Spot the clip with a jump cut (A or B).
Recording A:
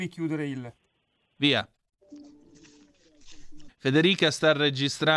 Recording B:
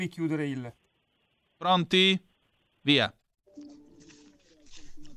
A